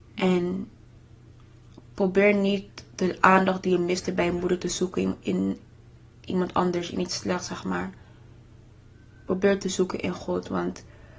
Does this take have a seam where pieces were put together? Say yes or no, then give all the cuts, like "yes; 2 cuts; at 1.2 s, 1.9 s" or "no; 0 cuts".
no; 0 cuts